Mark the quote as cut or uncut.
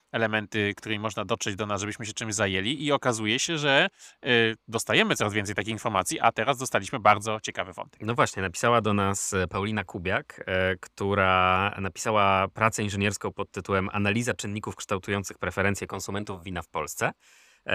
uncut